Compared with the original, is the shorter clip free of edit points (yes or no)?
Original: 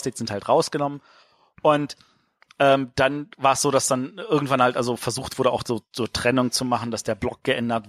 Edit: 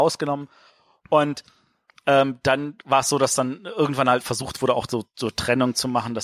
no